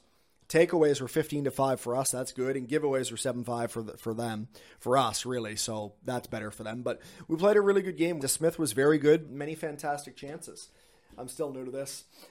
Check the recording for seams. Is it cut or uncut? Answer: cut